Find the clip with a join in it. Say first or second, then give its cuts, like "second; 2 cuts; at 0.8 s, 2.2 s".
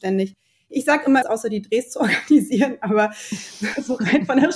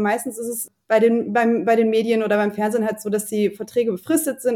first; 1 cut; at 1.2 s